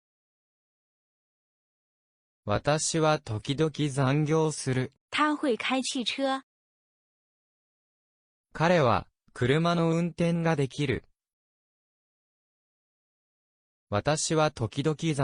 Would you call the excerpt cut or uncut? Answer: cut